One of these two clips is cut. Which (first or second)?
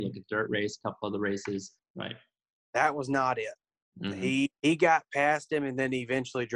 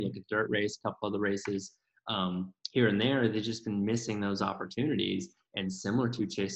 first